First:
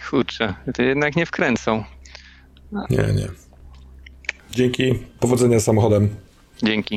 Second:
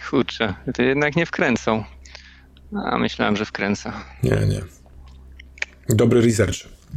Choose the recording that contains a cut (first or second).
first